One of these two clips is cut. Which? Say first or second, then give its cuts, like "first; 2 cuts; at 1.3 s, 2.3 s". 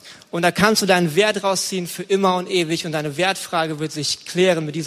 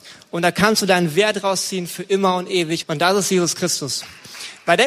second; 1 cut; at 2.8 s